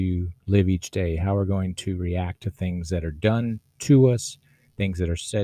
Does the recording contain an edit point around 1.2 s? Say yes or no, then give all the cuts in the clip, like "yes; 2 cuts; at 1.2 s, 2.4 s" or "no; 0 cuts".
no; 0 cuts